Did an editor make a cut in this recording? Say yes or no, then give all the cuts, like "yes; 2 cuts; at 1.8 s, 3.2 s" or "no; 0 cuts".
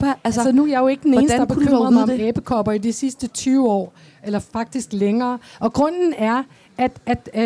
no; 0 cuts